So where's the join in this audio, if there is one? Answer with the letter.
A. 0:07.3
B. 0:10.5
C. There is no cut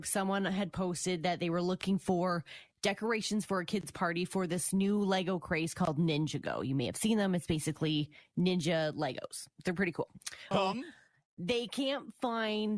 B